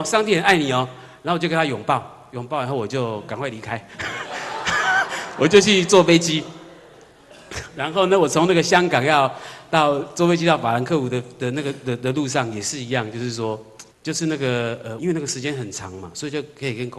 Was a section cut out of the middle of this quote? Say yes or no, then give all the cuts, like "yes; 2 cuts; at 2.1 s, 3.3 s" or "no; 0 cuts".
yes; 2 cuts; at 13.9 s, 15.0 s